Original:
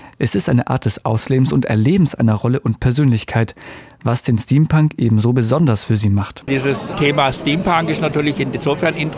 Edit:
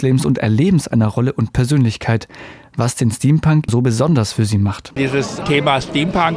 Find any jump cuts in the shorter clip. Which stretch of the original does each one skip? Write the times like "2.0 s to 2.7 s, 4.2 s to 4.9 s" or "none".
5.0 s to 5.2 s